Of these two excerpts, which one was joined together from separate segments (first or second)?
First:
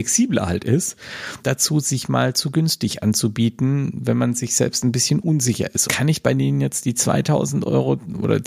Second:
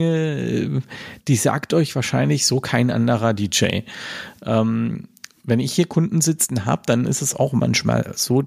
first